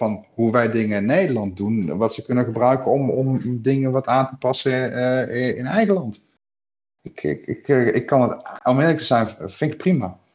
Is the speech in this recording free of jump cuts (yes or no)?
yes